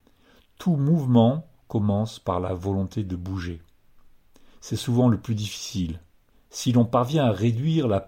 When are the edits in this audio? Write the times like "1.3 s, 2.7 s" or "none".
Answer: 6.3 s